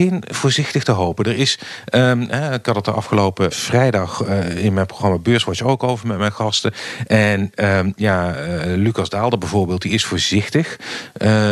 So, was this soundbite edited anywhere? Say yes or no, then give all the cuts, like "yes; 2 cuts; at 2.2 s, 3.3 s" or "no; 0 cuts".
yes; 1 cut; at 3.5 s